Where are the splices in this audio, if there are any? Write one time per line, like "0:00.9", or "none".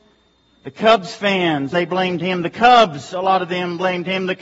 0:01.7